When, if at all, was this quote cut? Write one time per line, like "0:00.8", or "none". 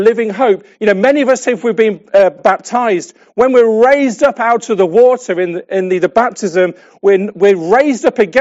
0:02.4